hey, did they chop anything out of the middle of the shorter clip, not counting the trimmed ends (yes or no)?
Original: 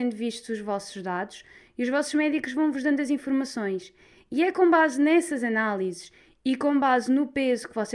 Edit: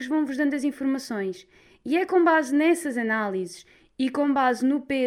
no